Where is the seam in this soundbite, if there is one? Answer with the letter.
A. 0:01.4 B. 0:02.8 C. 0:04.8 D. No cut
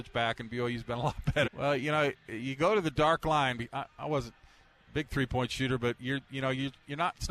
A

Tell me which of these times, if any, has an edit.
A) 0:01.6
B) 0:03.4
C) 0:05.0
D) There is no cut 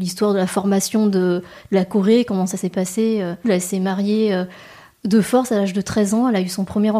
B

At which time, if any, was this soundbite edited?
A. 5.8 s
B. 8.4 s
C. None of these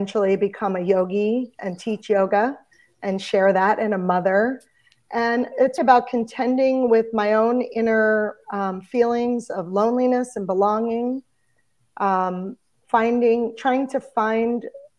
A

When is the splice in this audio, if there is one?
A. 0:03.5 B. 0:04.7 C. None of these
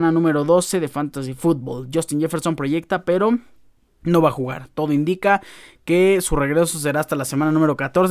C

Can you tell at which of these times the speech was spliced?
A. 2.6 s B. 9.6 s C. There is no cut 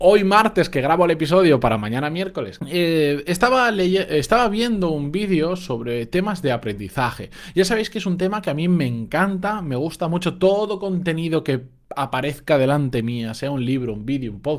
A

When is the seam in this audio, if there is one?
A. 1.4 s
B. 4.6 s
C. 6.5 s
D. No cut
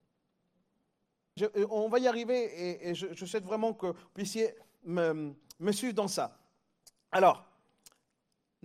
A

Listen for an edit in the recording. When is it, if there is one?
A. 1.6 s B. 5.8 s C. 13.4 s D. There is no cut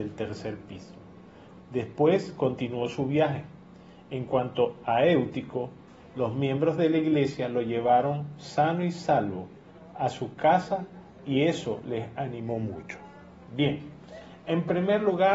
A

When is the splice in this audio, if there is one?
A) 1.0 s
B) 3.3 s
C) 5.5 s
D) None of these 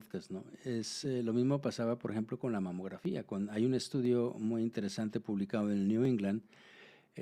D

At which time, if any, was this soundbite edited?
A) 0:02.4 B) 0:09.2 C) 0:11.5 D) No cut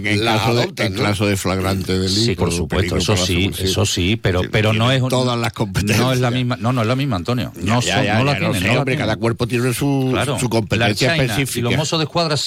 A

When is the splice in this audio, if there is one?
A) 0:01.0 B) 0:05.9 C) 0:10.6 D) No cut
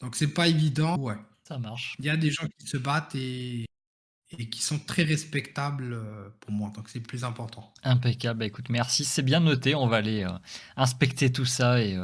A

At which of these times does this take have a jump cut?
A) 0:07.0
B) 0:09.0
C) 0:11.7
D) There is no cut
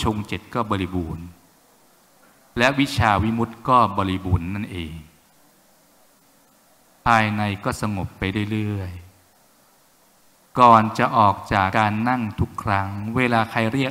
C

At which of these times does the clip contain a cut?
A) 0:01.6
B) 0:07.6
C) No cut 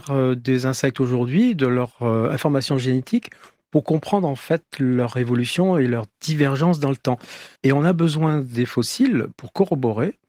B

